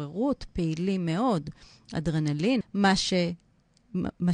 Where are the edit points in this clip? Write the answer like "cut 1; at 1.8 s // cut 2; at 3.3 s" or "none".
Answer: cut 1; at 2.6 s